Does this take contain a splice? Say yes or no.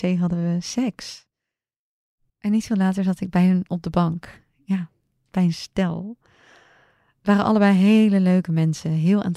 yes